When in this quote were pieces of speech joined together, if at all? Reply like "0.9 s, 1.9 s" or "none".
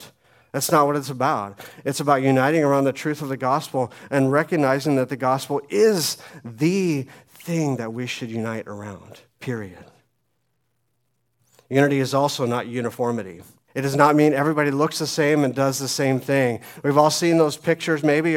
13.7 s